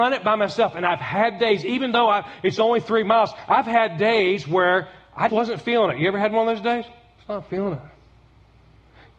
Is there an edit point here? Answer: yes; 1 cut; at 5.3 s

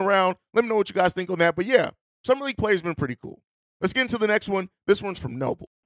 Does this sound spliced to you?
no; 0 cuts

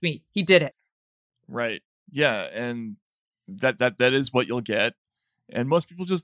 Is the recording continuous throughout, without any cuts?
no; 1 cut; at 2.0 s

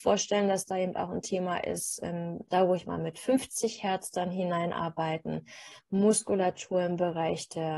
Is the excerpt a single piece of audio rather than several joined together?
no; 2 cuts; at 2.4 s, 5.8 s

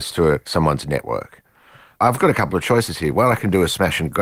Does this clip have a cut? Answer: no; 0 cuts

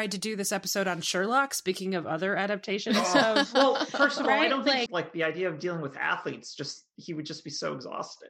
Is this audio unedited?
no; 1 cut; at 4.9 s

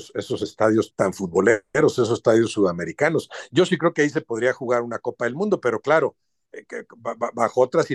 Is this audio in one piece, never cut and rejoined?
no; 1 cut; at 0.9 s

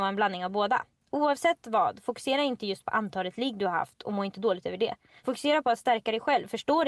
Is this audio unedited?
yes; 0 cuts

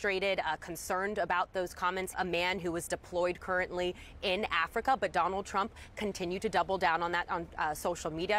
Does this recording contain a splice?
yes; 1 cut; at 2.1 s

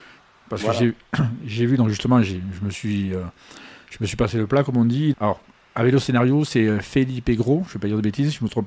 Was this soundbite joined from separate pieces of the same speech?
yes; 1 cut; at 5.1 s

